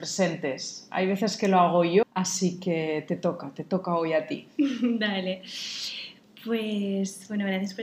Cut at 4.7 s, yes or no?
no